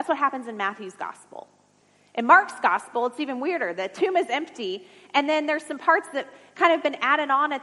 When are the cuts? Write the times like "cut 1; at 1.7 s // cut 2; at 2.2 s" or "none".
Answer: none

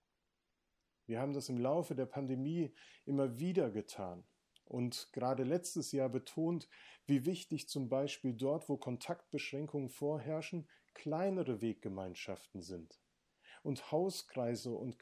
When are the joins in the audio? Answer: none

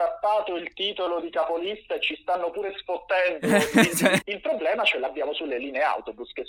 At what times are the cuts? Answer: cut 1; at 4.2 s

